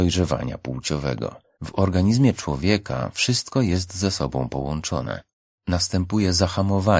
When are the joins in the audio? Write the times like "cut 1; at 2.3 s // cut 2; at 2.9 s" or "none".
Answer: cut 1; at 1.6 s